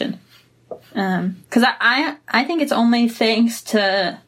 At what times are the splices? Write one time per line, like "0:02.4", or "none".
0:01.4